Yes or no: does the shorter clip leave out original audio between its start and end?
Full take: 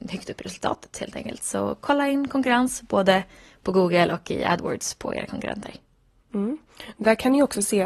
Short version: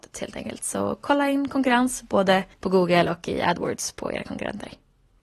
yes